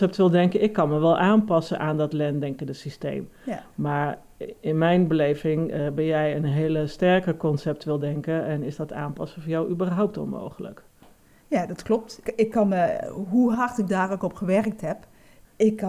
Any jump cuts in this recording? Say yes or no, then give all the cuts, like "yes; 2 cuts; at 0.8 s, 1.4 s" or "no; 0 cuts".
no; 0 cuts